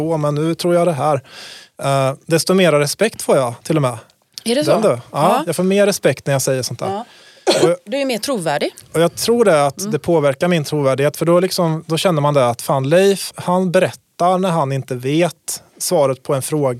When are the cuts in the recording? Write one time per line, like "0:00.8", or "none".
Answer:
0:13.3